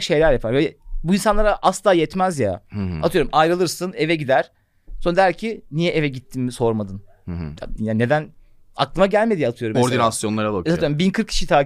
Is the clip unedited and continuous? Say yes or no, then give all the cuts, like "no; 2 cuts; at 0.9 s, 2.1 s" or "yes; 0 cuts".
no; 2 cuts; at 7.8 s, 9.7 s